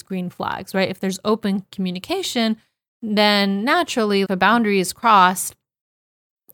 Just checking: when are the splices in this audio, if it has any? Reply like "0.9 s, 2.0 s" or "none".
4.2 s